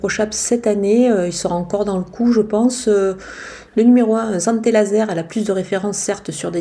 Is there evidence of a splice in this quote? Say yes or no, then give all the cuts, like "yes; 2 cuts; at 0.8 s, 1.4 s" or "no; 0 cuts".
yes; 1 cut; at 3.7 s